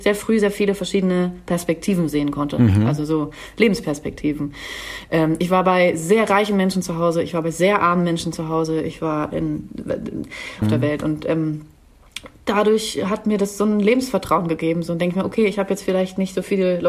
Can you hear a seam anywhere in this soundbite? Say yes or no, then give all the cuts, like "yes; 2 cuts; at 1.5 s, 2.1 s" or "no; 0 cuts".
yes; 1 cut; at 10.6 s